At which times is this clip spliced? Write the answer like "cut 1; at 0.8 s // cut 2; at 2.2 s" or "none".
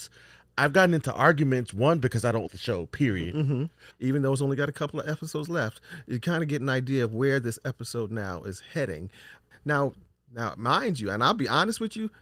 cut 1; at 2.5 s // cut 2; at 3.9 s // cut 3; at 9.5 s